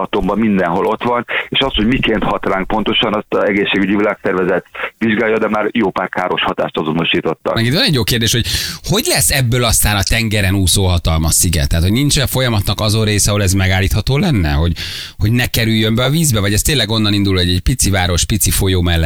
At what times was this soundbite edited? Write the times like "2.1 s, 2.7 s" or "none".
7.6 s